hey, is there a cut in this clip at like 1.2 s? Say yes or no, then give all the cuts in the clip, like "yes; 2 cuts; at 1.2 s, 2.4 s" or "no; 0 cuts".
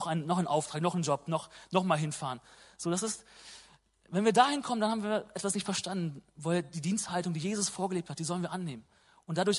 no; 0 cuts